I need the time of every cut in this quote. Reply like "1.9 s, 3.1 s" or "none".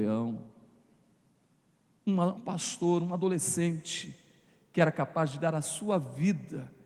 2.4 s